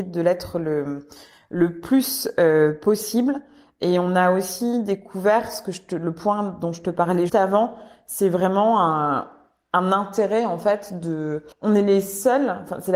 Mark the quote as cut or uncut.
cut